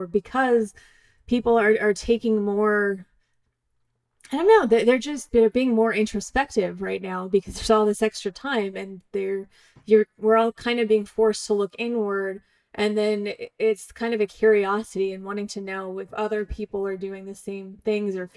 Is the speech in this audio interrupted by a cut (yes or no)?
yes